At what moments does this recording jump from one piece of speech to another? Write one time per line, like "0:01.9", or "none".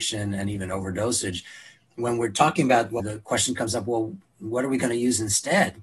0:03.0